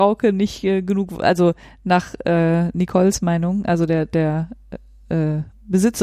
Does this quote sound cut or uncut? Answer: uncut